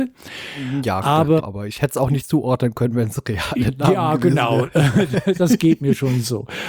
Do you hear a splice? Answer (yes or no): yes